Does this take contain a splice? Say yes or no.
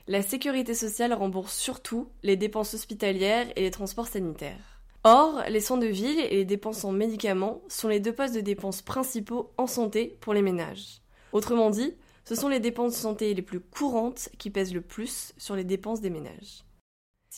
no